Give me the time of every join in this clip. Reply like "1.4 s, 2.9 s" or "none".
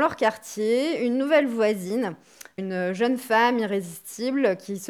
2.6 s